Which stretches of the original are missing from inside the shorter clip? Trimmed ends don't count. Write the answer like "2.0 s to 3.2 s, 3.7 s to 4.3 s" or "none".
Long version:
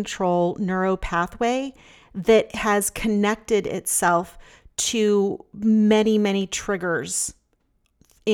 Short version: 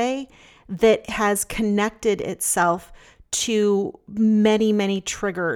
none